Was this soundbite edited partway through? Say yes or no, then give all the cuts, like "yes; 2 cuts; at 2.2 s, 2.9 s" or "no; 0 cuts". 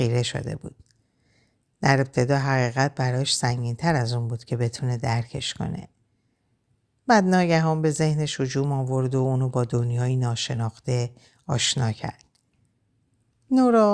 no; 0 cuts